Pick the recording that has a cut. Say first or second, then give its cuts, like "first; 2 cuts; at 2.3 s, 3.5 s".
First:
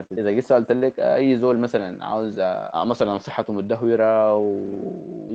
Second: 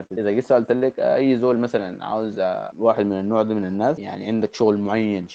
second; 1 cut; at 2.7 s